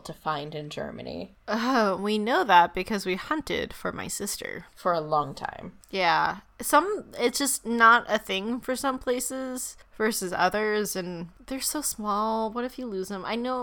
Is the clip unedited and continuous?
yes; 0 cuts

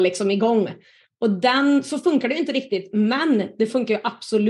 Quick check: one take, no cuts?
yes; 0 cuts

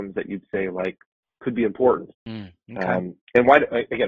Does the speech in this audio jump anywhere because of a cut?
yes; 1 cut; at 2.1 s

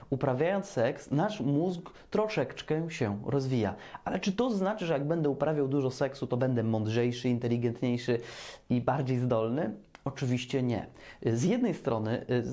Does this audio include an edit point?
no; 0 cuts

